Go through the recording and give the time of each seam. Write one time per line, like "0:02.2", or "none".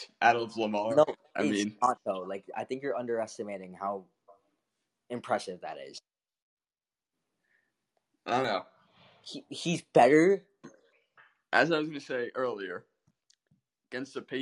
0:10.6